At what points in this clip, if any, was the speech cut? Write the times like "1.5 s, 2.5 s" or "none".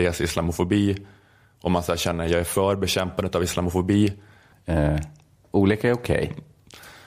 4.5 s